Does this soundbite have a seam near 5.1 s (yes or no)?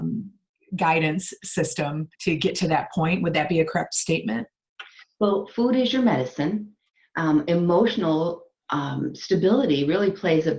no